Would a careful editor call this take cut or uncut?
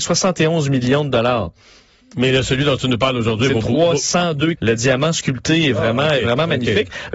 cut